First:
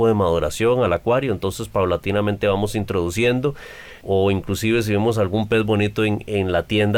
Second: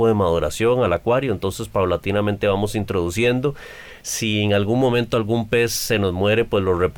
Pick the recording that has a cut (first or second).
first